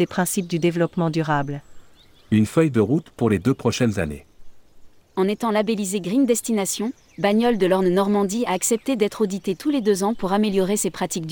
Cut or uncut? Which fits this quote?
uncut